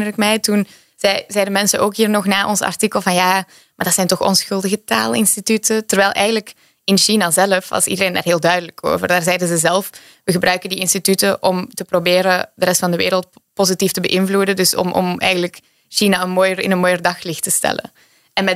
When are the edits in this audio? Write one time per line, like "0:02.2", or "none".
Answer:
none